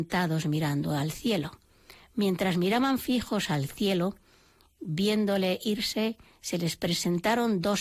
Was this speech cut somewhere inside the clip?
yes; 1 cut; at 2.0 s

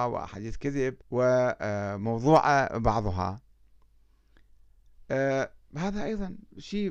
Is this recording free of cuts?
no; 1 cut; at 1.0 s

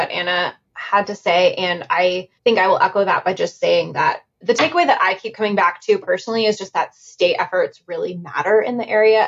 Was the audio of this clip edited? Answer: yes; 1 cut; at 2.4 s

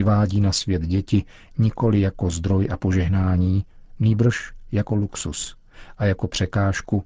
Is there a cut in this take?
no; 0 cuts

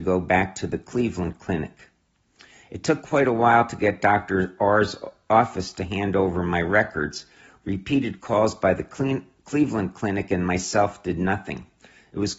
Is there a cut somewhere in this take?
no; 0 cuts

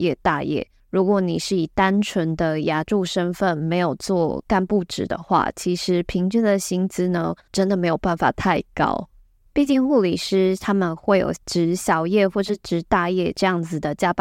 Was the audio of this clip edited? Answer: yes; 2 cuts; at 7.5 s, 9.5 s

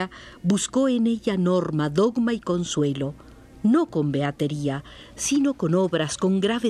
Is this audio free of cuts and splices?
yes; 0 cuts

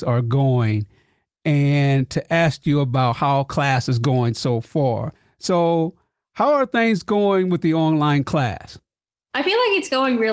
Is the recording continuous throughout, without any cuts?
yes; 0 cuts

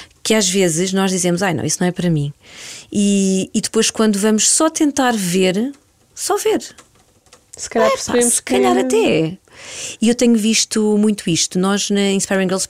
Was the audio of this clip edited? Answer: no; 0 cuts

